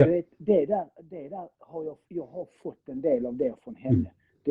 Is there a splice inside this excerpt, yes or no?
yes